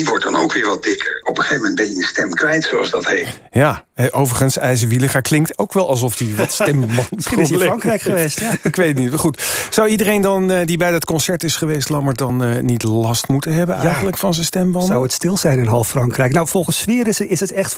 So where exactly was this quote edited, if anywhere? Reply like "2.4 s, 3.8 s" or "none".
none